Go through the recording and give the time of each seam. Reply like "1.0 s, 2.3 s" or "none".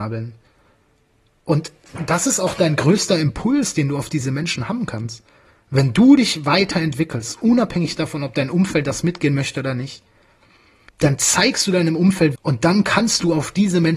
10.9 s, 12.3 s